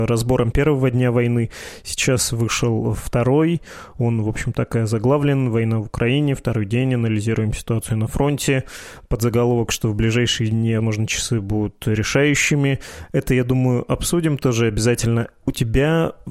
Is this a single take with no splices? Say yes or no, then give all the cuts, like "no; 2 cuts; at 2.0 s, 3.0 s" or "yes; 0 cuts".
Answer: no; 1 cut; at 10.8 s